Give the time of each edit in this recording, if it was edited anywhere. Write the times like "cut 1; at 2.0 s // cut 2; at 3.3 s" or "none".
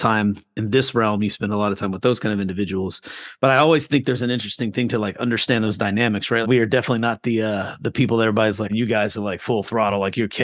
cut 1; at 3.4 s // cut 2; at 6.4 s // cut 3; at 8.7 s